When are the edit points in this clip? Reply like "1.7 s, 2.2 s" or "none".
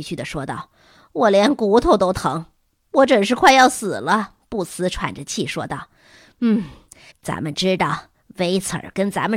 7.1 s